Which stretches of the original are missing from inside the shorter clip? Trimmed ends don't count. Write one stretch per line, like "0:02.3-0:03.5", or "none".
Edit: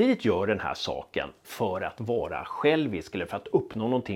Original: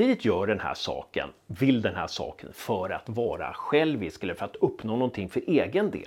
0:01.4-0:02.5